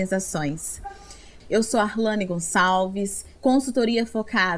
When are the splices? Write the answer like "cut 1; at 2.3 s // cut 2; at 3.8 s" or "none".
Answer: cut 1; at 1.4 s // cut 2; at 3.4 s